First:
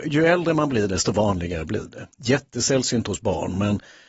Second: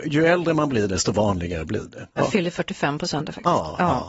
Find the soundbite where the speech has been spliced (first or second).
second